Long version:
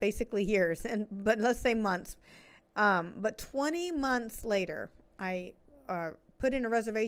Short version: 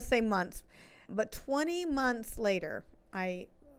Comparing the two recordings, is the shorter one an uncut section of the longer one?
no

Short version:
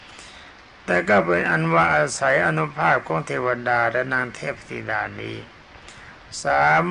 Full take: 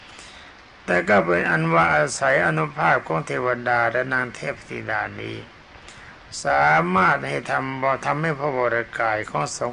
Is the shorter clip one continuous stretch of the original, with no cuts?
yes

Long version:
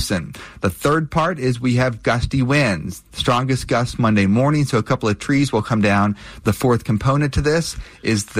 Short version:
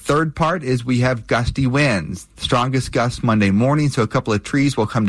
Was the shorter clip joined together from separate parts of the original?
no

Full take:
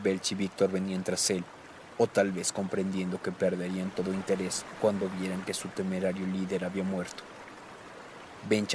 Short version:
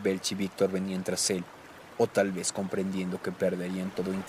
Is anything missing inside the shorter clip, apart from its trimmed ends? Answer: no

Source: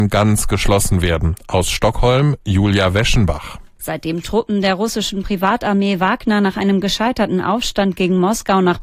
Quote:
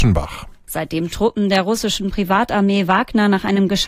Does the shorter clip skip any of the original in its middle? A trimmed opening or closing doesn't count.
no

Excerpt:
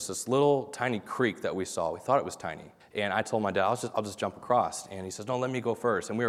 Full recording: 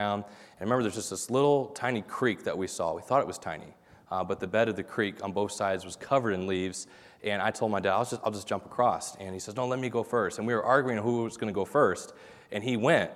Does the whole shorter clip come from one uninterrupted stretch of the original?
no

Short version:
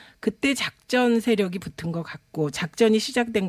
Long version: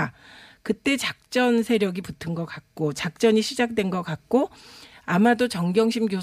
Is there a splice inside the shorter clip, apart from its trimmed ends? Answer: no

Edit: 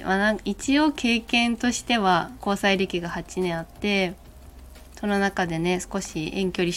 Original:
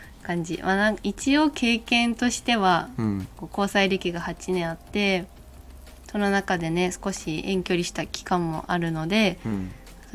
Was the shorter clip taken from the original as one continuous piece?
no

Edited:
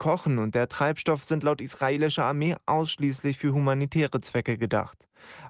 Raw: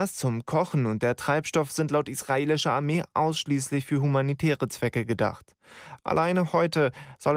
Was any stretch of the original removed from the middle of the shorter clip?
no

